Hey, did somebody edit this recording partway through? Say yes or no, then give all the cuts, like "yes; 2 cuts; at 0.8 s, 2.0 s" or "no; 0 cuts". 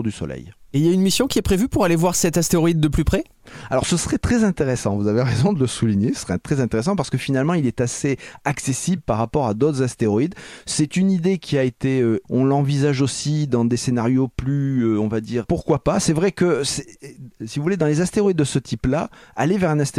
yes; 2 cuts; at 12.2 s, 15.4 s